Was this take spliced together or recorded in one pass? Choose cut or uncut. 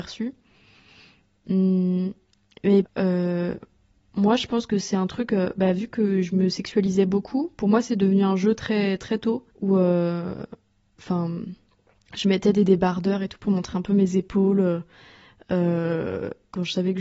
cut